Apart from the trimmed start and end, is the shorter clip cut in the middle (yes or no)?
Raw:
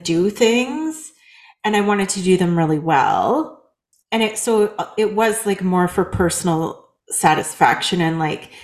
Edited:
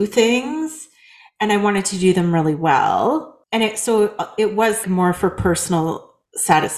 yes